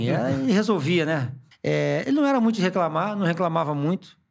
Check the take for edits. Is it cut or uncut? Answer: cut